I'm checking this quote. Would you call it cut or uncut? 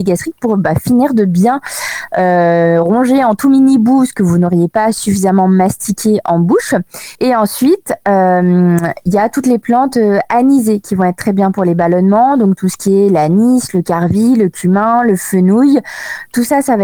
cut